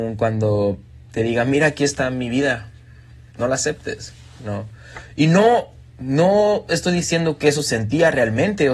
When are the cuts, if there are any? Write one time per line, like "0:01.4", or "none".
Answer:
0:03.3